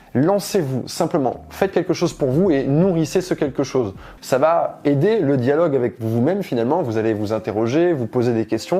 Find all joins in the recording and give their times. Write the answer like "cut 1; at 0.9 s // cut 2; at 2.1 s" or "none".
cut 1; at 4.2 s